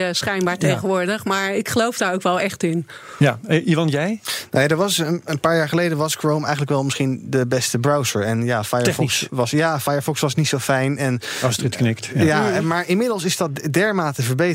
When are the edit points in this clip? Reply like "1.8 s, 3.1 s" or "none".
none